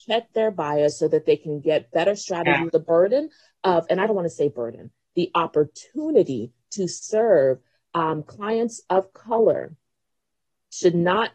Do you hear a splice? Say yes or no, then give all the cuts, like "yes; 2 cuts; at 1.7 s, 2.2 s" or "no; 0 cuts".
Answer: yes; 1 cut; at 2.7 s